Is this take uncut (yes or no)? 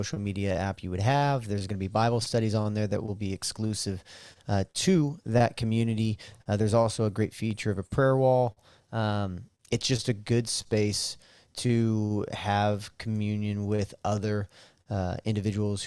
yes